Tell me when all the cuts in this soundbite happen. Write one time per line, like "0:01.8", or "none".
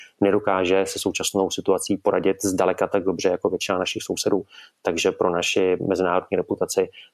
none